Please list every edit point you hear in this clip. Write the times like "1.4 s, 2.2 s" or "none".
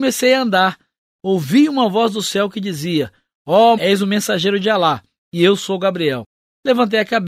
1.0 s, 3.8 s